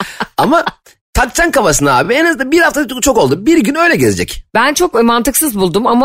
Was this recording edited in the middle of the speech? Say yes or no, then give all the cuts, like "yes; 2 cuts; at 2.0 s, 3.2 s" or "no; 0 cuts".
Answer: no; 0 cuts